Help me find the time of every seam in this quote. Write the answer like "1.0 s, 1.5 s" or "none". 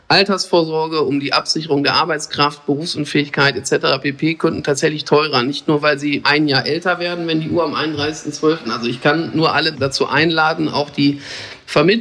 8.6 s